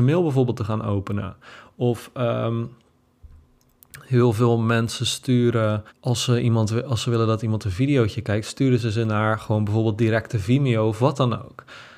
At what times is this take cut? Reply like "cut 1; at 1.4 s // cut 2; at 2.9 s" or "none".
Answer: cut 1; at 5.9 s